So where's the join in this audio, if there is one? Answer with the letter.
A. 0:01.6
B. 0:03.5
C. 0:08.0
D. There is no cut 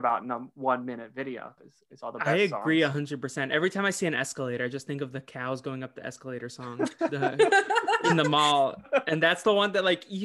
A